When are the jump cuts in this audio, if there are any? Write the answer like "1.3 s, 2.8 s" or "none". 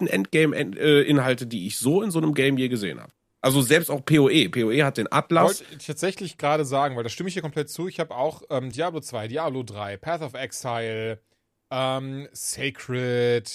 8.7 s